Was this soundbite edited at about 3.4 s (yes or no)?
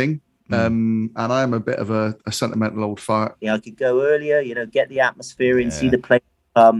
yes